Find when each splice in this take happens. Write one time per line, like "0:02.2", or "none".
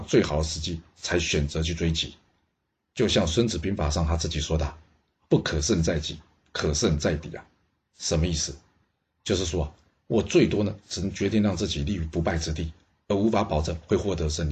none